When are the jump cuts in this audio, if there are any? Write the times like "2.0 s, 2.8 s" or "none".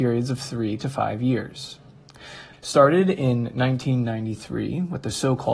2.5 s